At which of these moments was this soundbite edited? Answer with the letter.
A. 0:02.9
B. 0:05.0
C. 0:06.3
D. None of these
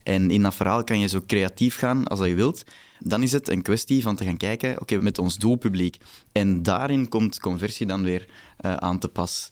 B